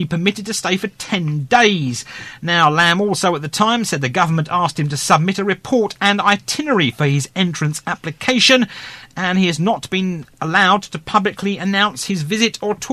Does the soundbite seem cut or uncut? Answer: uncut